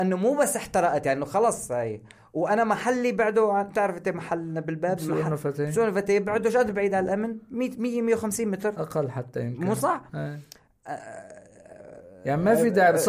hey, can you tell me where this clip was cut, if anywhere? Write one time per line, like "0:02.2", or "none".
none